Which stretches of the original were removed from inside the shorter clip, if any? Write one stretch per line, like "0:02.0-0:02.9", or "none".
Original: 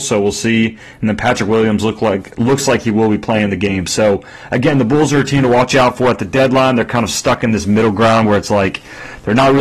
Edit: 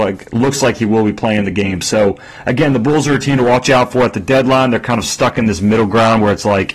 none